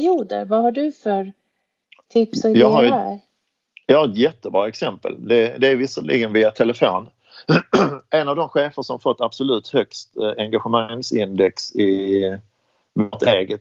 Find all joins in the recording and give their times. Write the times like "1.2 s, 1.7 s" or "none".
none